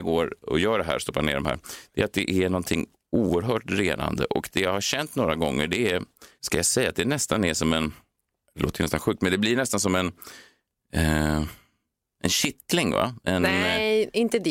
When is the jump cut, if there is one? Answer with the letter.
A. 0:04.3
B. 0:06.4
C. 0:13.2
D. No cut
B